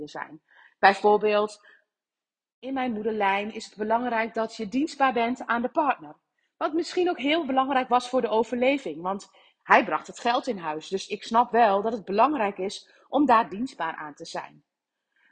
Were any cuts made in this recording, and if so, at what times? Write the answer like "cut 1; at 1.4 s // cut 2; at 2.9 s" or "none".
none